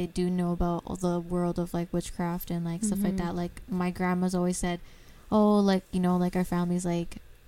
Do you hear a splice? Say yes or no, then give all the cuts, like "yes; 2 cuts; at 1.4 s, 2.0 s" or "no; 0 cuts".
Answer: no; 0 cuts